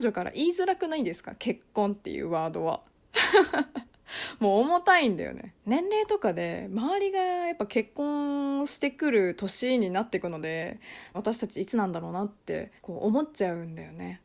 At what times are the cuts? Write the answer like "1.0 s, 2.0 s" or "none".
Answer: 5.6 s, 11.1 s, 12.8 s